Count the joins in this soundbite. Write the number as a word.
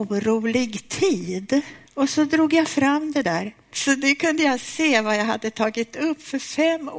two